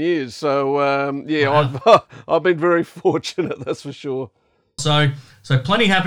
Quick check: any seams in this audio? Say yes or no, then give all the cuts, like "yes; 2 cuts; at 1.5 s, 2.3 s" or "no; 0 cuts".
yes; 1 cut; at 4.8 s